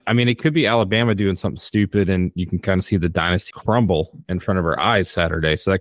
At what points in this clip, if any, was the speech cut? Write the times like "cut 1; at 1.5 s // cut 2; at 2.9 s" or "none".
cut 1; at 3.5 s